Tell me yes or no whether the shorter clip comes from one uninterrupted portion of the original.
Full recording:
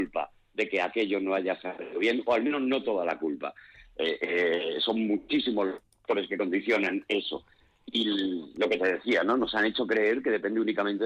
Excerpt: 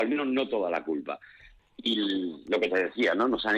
no